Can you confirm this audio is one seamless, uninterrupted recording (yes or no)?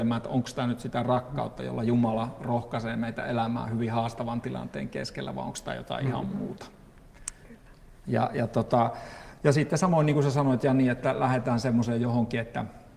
yes